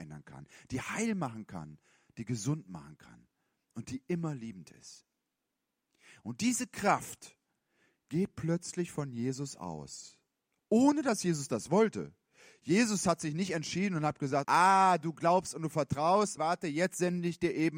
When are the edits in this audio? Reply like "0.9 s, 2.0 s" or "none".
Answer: 14.4 s, 16.4 s